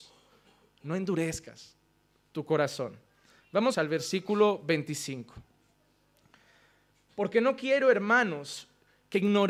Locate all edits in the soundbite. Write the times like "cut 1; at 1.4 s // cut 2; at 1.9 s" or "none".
cut 1; at 3.7 s